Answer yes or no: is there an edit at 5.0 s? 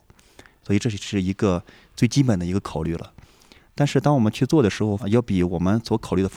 yes